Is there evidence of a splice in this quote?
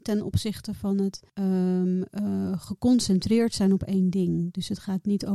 yes; 1 cut; at 1.3 s

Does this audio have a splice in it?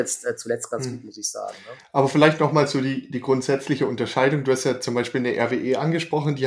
no; 0 cuts

